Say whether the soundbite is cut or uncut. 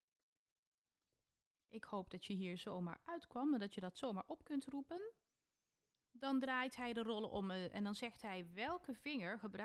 uncut